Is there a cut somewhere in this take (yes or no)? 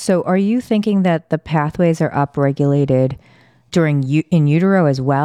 yes